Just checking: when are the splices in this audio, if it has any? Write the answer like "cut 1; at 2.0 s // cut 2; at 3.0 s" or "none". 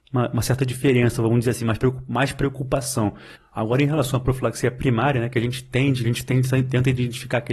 cut 1; at 3.4 s // cut 2; at 6.0 s